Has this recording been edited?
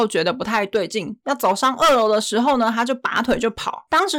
no; 0 cuts

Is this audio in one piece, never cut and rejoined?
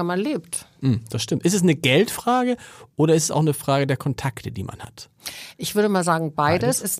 yes; 0 cuts

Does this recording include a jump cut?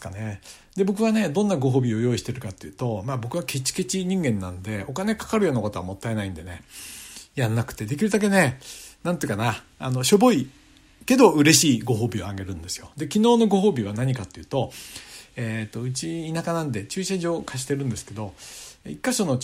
no; 0 cuts

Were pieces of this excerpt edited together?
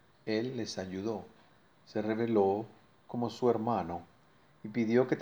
no; 0 cuts

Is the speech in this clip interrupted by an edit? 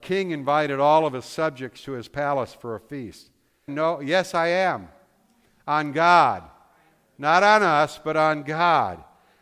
yes; 1 cut; at 3.7 s

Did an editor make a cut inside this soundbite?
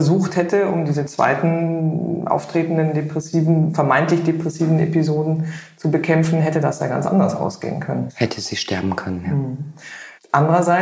no; 0 cuts

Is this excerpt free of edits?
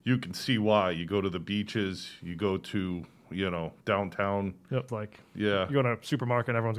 no; 1 cut; at 4.9 s

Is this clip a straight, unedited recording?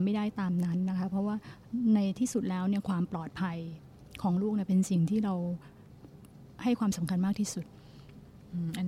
yes; 0 cuts

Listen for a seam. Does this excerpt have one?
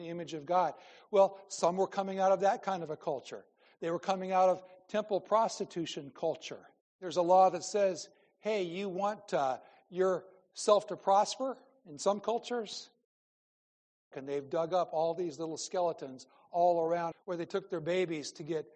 yes; 3 cuts; at 6.8 s, 14.1 s, 17.1 s

